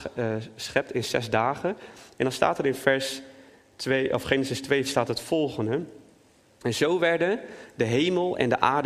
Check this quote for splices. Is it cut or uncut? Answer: cut